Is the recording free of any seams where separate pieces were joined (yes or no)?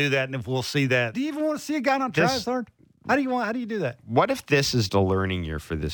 no